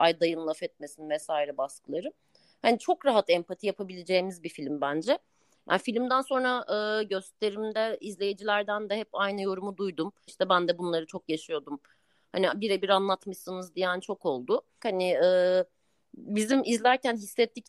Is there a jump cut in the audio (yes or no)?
yes